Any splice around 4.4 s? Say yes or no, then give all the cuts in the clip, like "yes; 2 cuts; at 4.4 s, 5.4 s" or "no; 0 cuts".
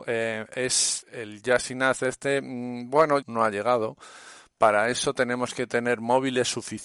no; 2 cuts; at 1.0 s, 3.2 s